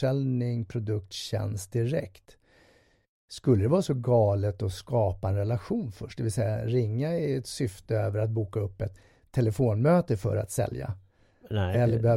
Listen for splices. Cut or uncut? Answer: uncut